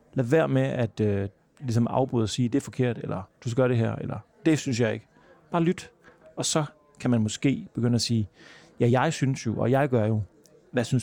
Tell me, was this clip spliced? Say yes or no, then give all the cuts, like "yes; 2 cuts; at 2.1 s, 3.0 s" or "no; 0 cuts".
yes; 1 cut; at 6.2 s